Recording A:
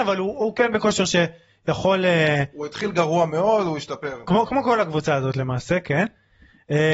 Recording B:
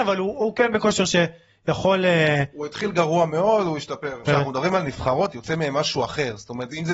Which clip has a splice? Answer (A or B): B